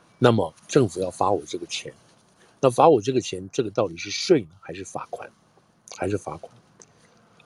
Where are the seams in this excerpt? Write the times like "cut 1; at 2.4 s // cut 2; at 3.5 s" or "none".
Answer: none